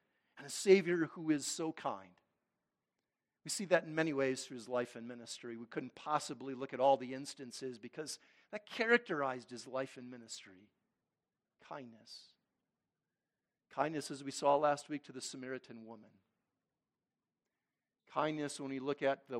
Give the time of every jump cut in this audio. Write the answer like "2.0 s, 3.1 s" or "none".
none

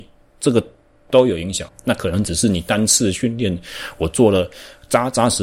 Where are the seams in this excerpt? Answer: 1.7 s

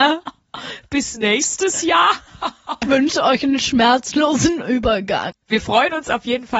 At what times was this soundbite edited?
2.8 s, 5.3 s

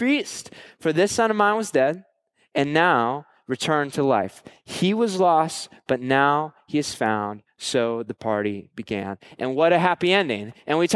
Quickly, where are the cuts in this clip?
none

